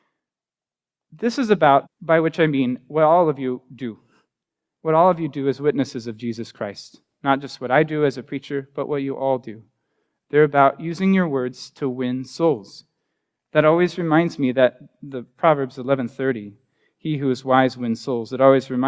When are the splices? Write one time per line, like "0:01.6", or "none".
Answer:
0:01.8